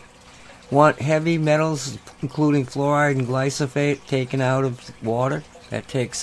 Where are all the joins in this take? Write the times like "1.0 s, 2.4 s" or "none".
none